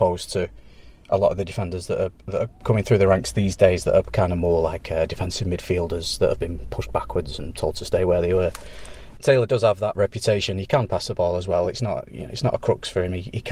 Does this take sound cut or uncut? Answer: uncut